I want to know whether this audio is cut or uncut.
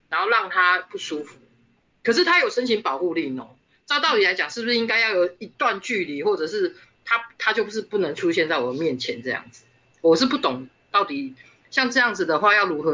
uncut